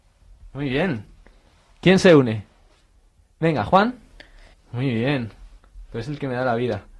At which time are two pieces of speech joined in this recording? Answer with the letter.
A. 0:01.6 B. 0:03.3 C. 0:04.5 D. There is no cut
C